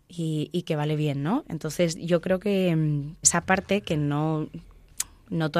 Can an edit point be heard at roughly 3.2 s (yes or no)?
yes